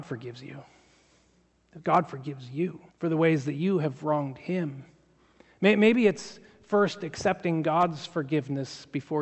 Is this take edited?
yes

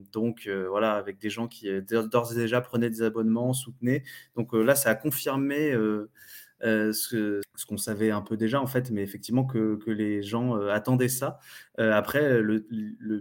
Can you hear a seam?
yes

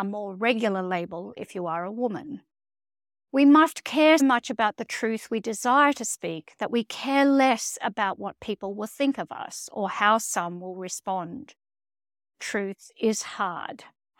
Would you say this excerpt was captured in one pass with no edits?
no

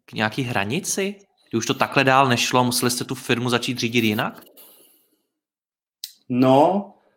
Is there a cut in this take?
no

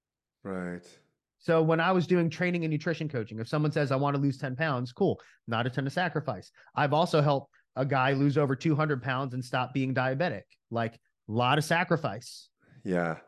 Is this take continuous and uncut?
yes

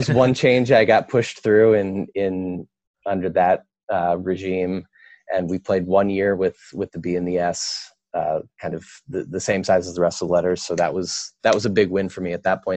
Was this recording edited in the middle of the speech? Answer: no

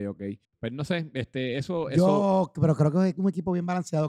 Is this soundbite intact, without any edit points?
yes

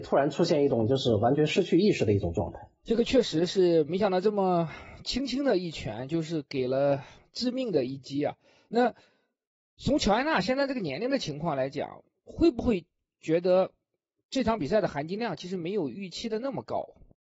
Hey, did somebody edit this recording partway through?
no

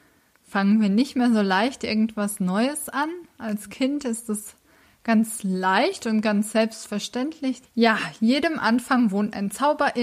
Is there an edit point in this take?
yes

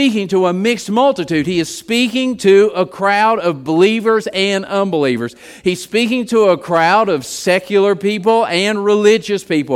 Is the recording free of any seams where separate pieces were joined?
yes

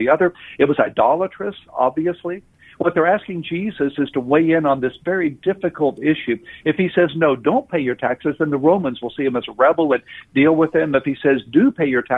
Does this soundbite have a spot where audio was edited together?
no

